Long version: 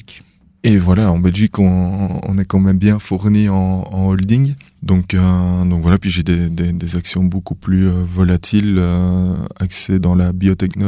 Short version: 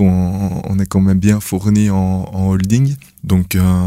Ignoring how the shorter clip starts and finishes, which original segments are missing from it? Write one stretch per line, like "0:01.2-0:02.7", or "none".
none

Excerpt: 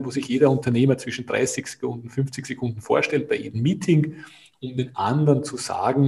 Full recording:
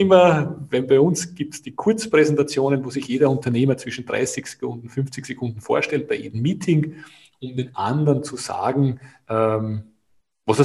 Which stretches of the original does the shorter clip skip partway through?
none

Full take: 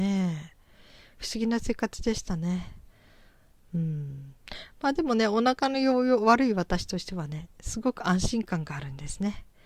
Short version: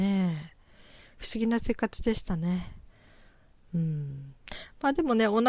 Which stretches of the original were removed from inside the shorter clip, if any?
none

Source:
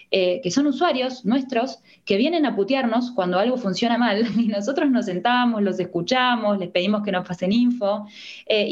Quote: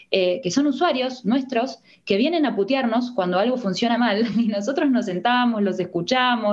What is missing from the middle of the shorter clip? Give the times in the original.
none

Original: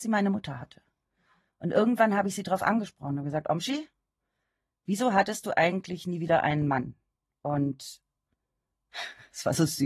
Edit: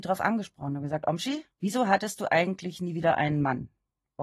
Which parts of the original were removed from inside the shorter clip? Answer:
0:03.9-0:04.8

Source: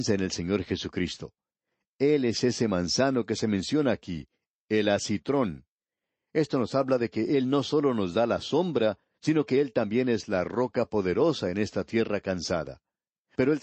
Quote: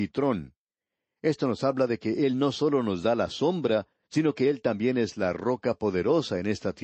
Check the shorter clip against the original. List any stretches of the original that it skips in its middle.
none

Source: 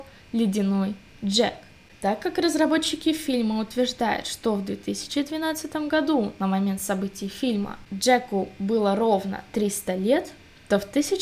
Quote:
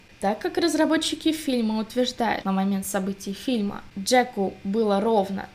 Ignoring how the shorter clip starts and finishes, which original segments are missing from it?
0:04.2-0:06.4

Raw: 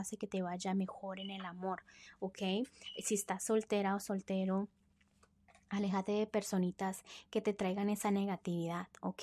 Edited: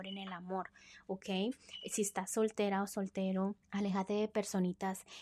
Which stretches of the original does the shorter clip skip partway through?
0:04.8-0:05.6

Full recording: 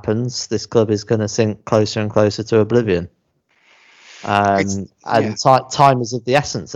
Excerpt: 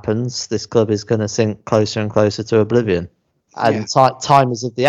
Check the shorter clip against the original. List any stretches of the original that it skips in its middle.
0:03.5-0:05.0

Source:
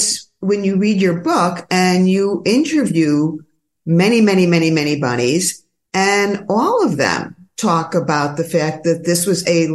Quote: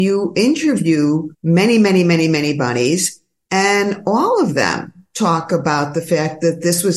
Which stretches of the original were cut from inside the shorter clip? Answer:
0:03.4-0:03.8

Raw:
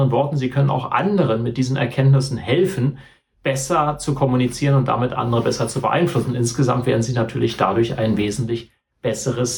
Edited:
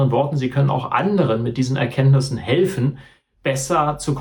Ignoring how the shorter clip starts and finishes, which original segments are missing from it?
none

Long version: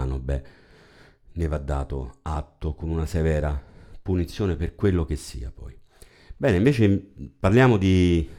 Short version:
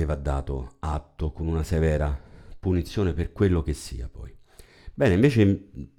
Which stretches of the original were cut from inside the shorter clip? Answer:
none

